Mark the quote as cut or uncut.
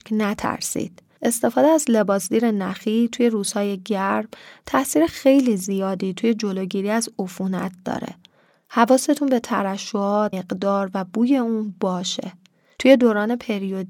cut